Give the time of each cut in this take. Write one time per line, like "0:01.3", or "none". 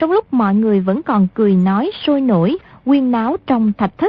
none